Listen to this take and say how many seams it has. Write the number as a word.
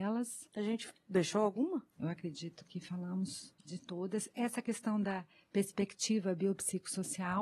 one